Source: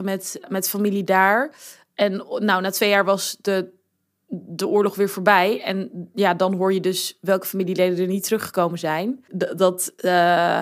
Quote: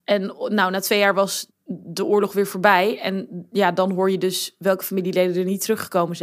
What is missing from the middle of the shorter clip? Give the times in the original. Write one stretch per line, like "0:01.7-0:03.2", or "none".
0:03.4-0:04.1